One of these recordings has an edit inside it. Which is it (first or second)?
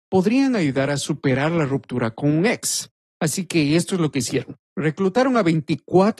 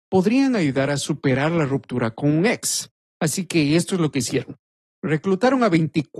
first